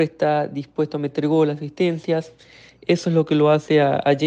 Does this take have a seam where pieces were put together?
no; 0 cuts

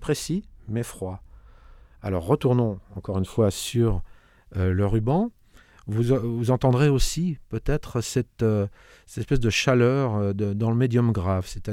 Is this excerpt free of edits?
yes; 0 cuts

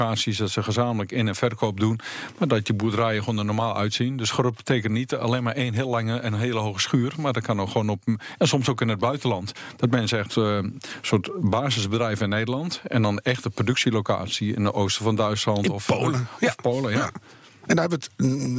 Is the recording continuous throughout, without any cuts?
no; 1 cut; at 10.3 s

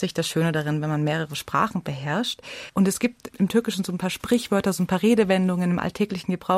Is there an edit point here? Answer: yes; 1 cut; at 2.7 s

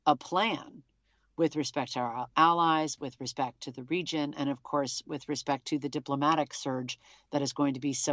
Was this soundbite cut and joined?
no; 0 cuts

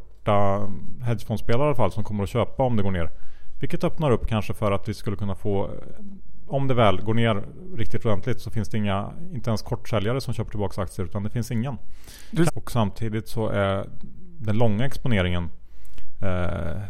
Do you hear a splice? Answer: yes; 1 cut; at 12.5 s

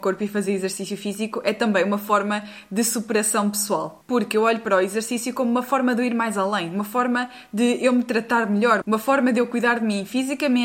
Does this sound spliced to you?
yes; 1 cut; at 8.8 s

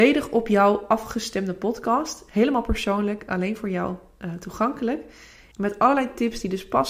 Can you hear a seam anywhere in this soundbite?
yes; 1 cut; at 5.5 s

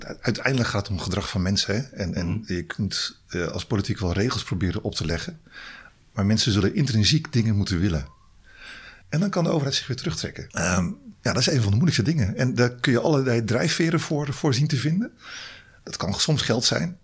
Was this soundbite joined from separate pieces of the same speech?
yes; 2 cuts; at 9.0 s, 10.5 s

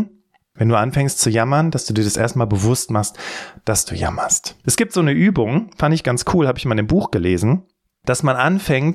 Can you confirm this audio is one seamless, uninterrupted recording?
no; 1 cut; at 4.6 s

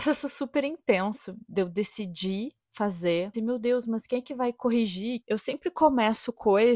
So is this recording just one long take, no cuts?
no; 2 cuts; at 3.3 s, 5.2 s

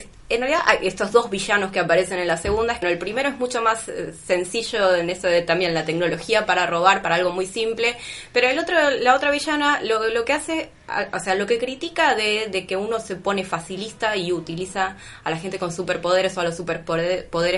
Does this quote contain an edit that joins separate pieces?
yes; 1 cut; at 2.8 s

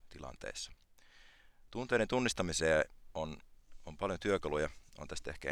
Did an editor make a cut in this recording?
no; 0 cuts

